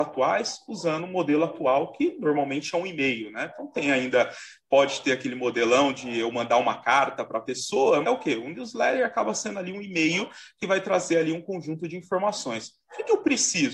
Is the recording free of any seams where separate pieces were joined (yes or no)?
no